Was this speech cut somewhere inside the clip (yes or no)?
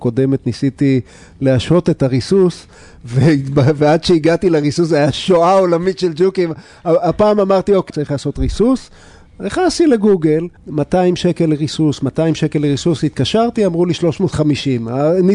yes